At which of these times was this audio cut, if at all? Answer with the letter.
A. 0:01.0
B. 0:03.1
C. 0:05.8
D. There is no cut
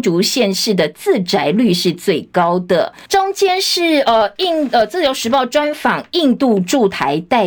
B